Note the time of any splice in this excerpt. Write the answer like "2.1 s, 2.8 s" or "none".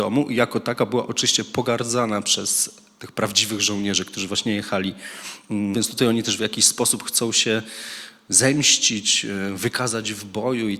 5.7 s